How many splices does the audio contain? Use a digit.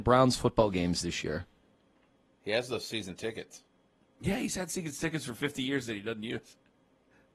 0